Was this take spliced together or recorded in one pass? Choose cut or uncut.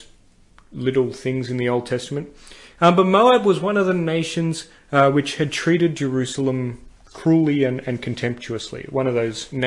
uncut